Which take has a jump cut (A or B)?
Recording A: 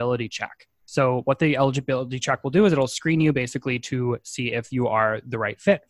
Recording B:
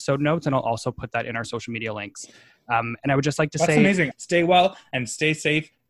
B